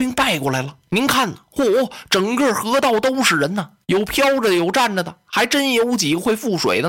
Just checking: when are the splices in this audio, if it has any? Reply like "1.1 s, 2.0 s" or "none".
none